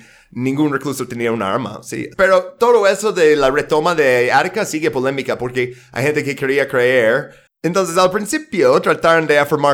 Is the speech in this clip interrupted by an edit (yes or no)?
yes